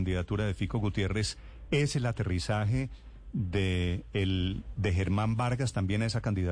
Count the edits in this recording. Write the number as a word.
zero